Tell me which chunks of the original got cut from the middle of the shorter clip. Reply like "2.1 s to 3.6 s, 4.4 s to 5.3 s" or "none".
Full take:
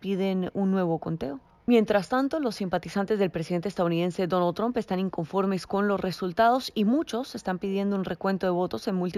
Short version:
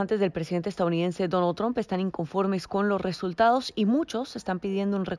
none